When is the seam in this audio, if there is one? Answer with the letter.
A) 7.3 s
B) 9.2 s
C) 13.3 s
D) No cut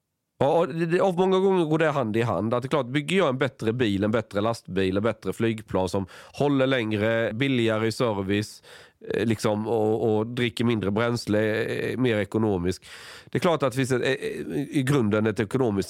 A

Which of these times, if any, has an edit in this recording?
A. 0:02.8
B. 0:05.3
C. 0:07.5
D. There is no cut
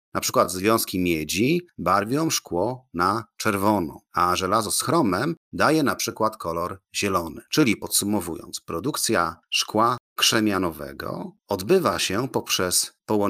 C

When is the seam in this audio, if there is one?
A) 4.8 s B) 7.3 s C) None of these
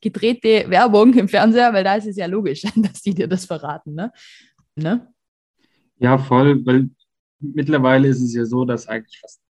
A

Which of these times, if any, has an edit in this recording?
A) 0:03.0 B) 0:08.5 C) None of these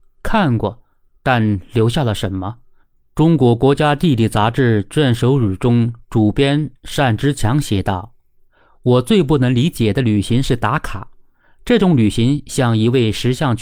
A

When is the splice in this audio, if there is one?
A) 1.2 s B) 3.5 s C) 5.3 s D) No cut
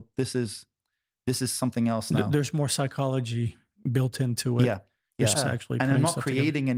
C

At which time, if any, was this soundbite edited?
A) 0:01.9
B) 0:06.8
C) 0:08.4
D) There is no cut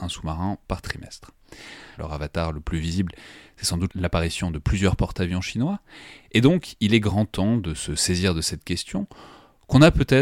A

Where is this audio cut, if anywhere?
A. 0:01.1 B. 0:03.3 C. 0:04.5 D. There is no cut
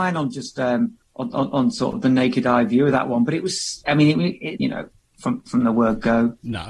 C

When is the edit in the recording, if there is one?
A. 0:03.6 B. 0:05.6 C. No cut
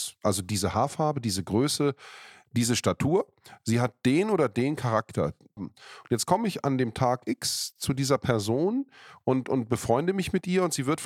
B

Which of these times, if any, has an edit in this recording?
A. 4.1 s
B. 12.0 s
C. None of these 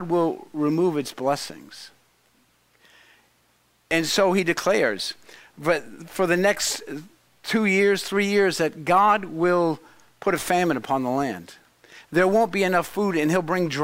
C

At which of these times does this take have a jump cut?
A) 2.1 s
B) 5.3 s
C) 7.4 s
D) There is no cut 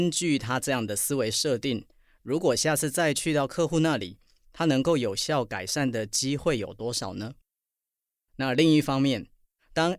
D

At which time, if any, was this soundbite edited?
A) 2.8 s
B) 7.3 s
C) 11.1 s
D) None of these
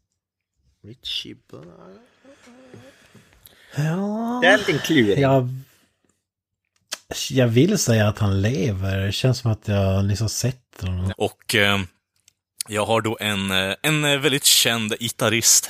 C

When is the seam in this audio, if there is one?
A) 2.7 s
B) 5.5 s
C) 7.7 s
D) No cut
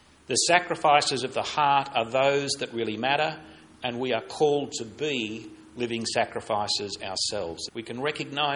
C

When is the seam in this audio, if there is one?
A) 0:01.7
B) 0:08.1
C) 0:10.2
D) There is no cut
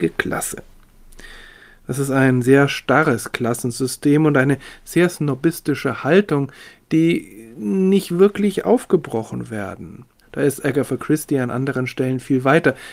C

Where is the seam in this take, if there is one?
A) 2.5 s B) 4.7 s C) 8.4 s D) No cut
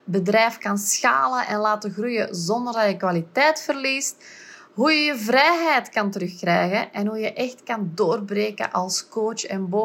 D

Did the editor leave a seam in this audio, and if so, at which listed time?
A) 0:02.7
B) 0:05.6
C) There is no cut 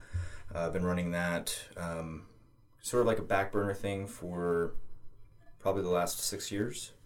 C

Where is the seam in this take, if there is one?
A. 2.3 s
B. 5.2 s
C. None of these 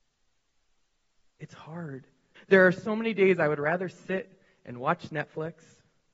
A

